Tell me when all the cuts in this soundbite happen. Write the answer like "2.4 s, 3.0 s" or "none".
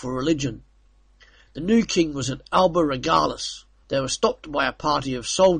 3.8 s